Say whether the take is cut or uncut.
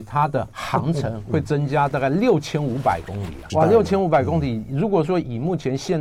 cut